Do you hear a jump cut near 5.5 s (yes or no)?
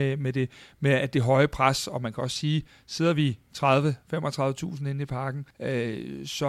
yes